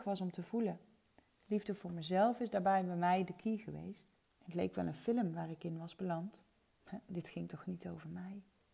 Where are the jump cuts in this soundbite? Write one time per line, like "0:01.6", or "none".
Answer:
0:04.2

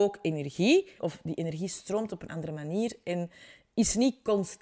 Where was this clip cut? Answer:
0:01.0

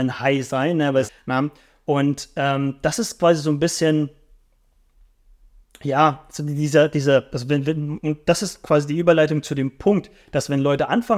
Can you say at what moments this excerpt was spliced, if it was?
0:01.1

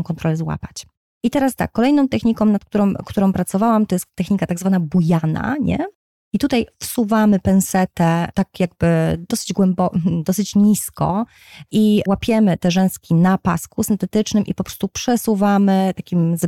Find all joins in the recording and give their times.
none

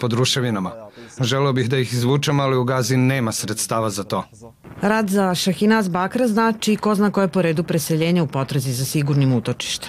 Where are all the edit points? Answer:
0:01.2

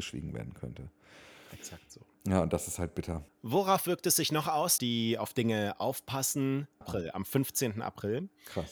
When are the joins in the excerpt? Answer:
0:03.3
0:04.8
0:06.8

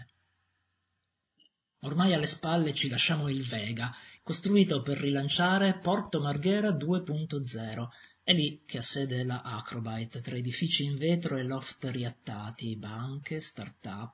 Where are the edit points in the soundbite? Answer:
0:04.2

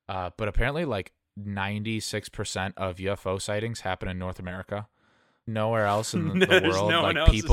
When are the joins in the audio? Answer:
0:05.5

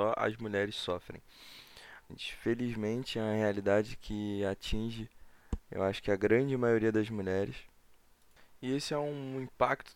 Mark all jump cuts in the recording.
0:02.1

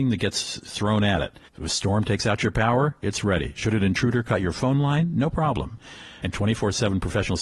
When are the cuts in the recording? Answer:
0:01.5
0:06.2

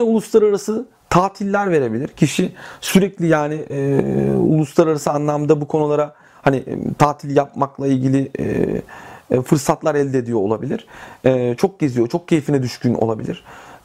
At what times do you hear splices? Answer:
none

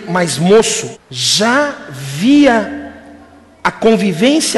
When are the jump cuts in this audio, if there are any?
0:00.9

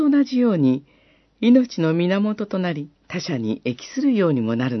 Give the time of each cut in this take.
0:01.3
0:03.0

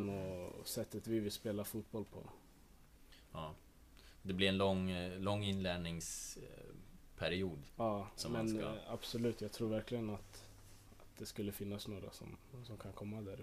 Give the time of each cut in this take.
0:08.2

